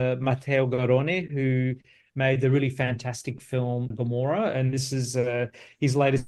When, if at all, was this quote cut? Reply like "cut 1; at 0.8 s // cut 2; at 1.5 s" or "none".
cut 1; at 3.9 s